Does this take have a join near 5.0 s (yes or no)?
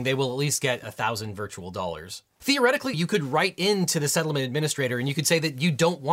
no